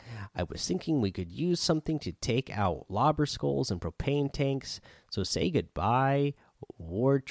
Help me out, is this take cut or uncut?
uncut